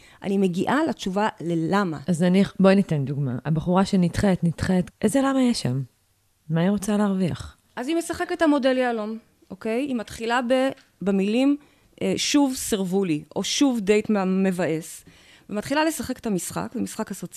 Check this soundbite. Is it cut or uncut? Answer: cut